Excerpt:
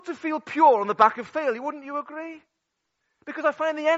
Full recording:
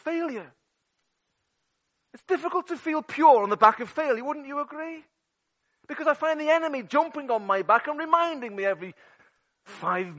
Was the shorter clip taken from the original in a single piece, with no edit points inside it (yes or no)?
yes